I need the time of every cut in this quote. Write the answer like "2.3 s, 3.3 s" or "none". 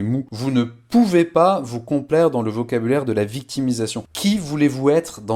4.1 s